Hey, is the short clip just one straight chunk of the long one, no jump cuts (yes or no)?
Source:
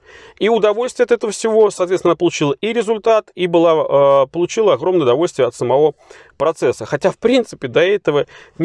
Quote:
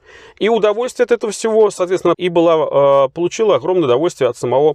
no